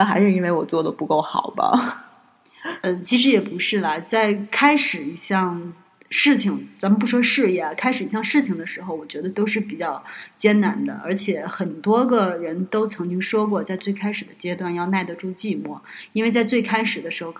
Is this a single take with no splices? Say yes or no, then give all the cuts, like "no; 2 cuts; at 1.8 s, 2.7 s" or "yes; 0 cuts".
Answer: yes; 0 cuts